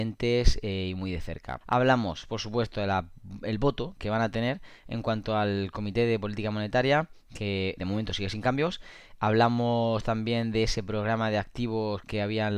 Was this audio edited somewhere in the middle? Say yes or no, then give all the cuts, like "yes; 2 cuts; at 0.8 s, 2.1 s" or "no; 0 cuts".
yes; 2 cuts; at 1.6 s, 7.8 s